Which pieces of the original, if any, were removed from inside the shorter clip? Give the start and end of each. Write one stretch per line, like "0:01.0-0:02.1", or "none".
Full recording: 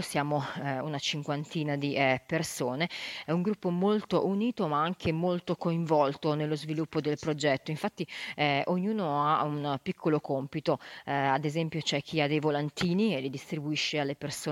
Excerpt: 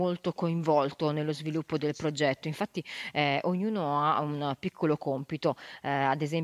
none